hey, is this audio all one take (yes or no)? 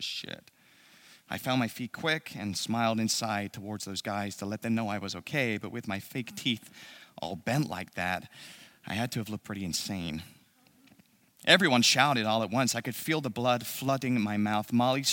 yes